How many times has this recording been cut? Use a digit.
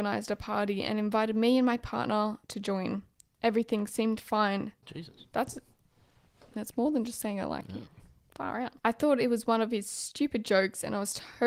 3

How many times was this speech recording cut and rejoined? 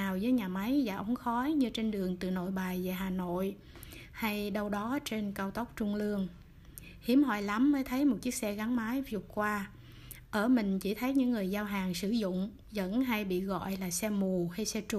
1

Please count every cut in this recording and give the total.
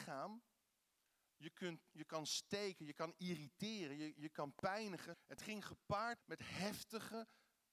2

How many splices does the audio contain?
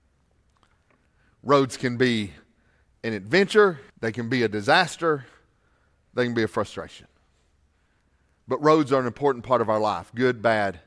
1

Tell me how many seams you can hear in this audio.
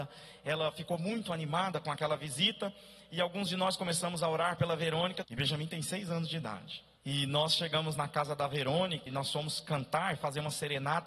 3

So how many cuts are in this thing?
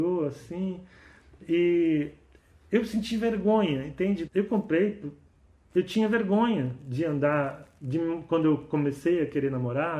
1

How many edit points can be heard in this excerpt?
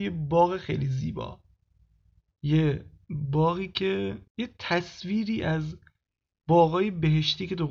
1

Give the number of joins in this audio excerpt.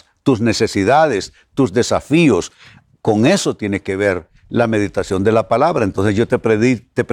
0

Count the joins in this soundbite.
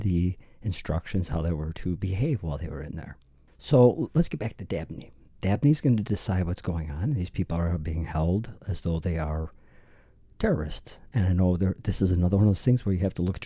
1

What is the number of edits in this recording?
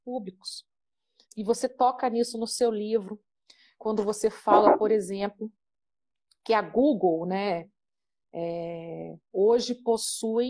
1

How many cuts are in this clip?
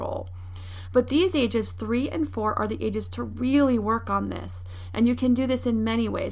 0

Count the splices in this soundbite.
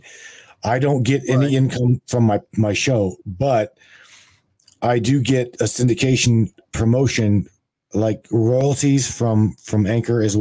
0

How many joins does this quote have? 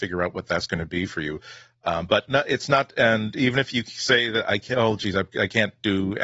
0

